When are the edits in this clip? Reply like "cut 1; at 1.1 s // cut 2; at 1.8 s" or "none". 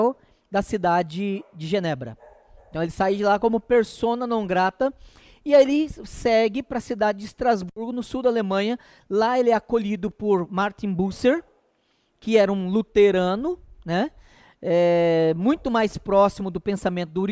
none